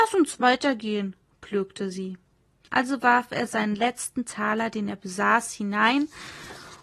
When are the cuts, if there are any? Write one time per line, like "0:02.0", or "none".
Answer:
0:02.7